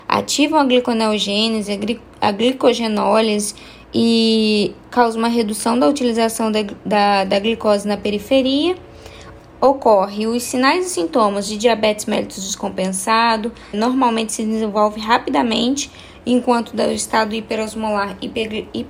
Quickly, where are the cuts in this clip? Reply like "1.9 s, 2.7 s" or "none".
9.4 s, 13.7 s